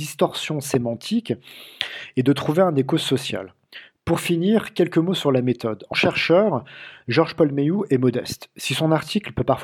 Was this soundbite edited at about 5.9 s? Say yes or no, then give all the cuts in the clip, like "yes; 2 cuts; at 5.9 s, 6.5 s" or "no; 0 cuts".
yes; 1 cut; at 5.9 s